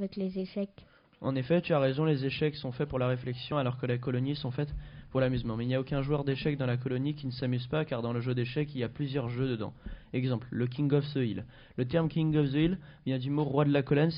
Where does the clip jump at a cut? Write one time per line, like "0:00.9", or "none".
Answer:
none